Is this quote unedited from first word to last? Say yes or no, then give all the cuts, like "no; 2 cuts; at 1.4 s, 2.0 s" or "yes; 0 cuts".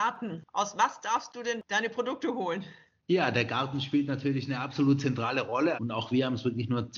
no; 1 cut; at 5.7 s